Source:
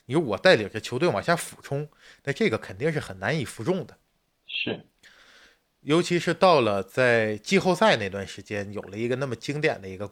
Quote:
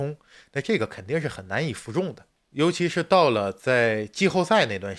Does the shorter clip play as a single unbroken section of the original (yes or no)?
no